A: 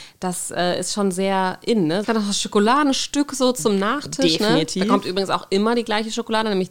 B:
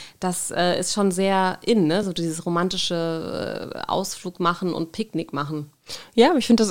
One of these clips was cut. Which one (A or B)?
A